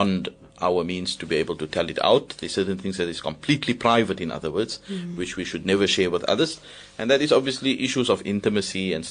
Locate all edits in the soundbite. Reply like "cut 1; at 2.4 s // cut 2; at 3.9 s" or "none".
none